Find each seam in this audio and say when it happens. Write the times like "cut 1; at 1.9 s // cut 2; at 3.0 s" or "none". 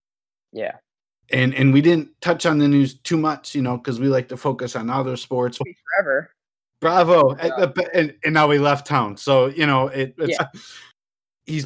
cut 1; at 5.6 s // cut 2; at 10.4 s